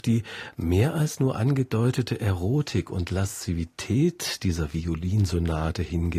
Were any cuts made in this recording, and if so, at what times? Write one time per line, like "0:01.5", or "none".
none